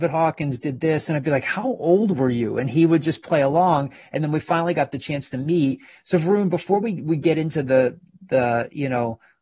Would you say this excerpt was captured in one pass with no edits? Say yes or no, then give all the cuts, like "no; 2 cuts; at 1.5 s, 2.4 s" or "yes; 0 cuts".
yes; 0 cuts